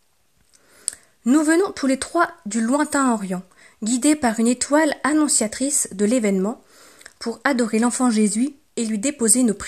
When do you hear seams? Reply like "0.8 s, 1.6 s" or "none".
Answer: none